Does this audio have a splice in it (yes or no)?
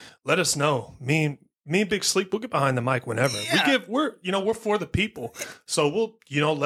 no